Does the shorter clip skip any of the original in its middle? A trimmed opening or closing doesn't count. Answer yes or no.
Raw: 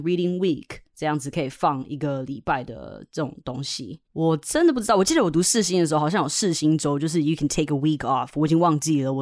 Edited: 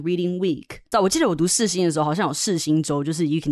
yes